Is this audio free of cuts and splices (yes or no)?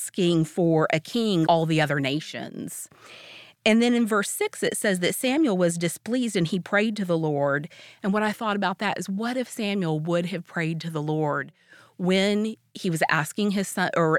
no